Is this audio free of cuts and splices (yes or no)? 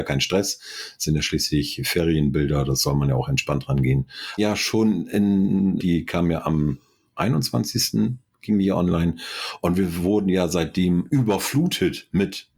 no